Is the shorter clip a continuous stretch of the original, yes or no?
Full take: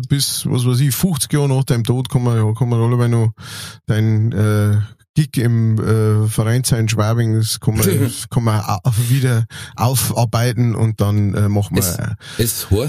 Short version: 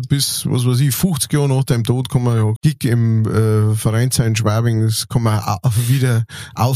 no